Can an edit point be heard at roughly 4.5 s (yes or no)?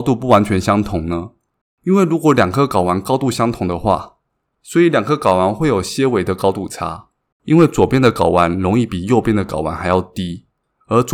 yes